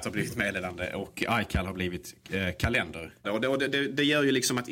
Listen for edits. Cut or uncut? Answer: cut